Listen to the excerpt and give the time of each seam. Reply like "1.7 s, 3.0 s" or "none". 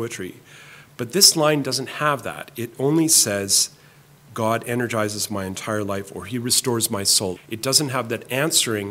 7.4 s